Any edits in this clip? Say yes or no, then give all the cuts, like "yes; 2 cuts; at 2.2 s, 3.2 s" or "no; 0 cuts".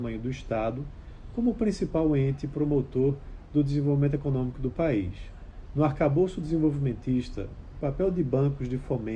yes; 1 cut; at 5.7 s